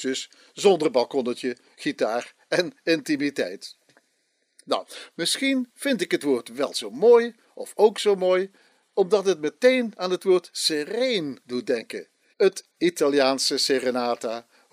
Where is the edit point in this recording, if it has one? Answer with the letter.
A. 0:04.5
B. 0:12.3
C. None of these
B